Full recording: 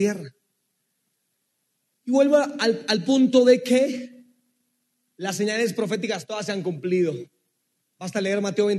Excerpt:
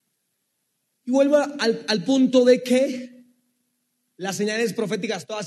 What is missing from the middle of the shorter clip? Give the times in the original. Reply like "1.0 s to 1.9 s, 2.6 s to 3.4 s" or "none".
none